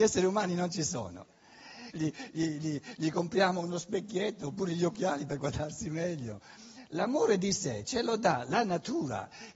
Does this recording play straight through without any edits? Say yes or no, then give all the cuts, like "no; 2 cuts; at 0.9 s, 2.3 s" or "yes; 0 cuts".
no; 1 cut; at 1.9 s